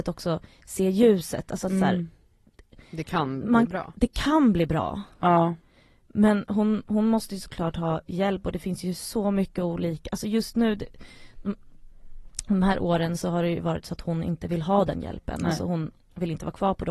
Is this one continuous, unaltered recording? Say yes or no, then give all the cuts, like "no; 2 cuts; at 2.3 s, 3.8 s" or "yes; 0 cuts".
yes; 0 cuts